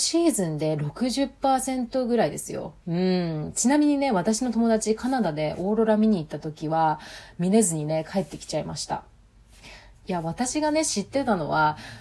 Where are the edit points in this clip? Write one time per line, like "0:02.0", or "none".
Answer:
0:02.8
0:09.9